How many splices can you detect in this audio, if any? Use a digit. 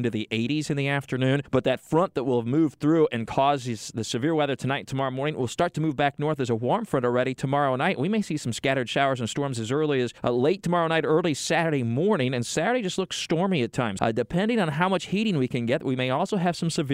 1